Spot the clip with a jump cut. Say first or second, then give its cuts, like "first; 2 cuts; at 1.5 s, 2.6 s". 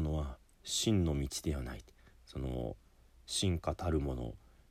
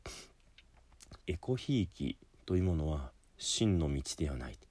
second; 1 cut; at 1.2 s